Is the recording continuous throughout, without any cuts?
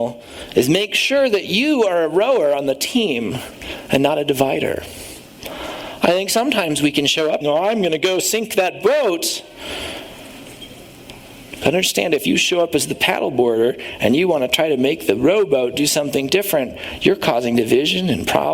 no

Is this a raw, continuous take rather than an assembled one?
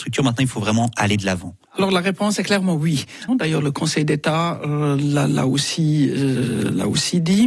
no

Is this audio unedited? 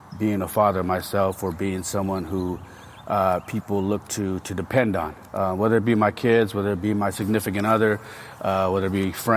no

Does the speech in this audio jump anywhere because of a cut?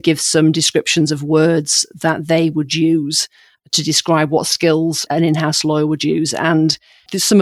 no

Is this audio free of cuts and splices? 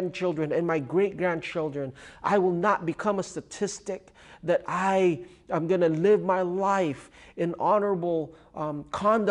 yes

